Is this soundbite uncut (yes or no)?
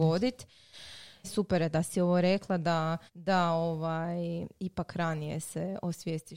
no